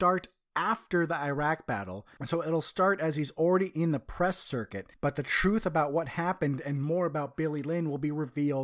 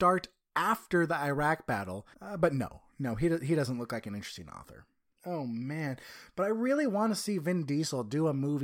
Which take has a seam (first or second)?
second